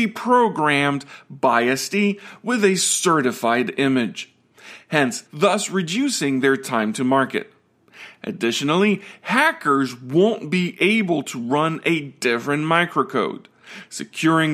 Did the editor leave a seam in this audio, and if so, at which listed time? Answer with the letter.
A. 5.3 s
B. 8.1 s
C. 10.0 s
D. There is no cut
A